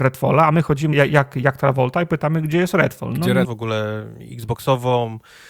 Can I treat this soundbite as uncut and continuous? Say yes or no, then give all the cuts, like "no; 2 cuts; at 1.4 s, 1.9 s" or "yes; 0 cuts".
no; 2 cuts; at 0.9 s, 3.4 s